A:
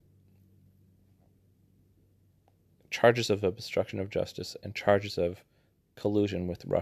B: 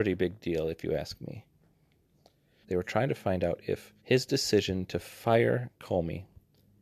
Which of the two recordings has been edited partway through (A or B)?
B